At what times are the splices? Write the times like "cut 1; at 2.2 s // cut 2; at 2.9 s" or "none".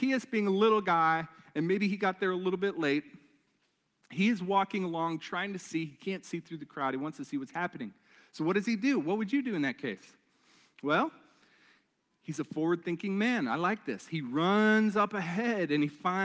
none